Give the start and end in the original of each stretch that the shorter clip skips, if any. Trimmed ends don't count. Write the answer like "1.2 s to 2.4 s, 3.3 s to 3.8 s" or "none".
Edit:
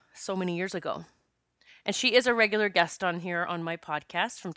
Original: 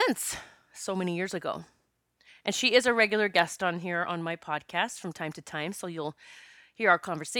none